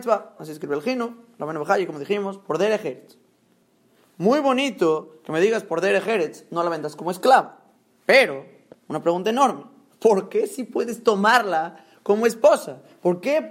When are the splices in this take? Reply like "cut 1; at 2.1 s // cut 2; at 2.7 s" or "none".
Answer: none